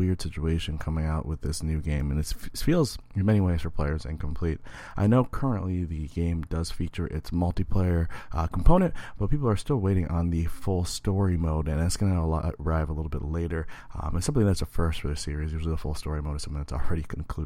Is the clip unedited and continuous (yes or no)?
yes